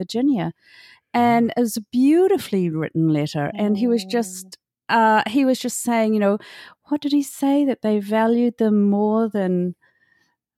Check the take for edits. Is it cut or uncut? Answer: uncut